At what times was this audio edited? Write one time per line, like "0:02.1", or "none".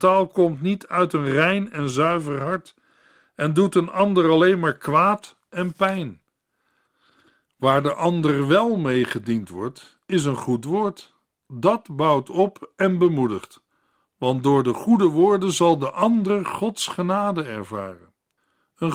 none